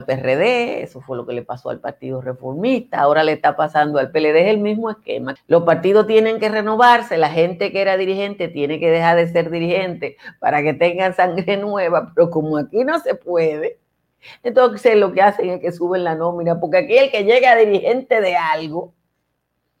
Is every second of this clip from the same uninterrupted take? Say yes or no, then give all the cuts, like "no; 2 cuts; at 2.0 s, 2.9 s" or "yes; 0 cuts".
no; 1 cut; at 5.4 s